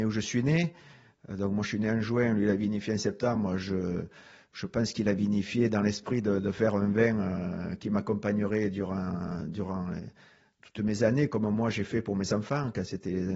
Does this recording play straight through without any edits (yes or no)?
yes